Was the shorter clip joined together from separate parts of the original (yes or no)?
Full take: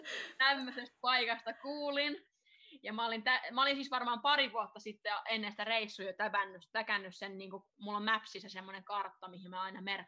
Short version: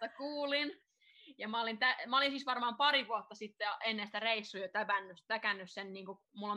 no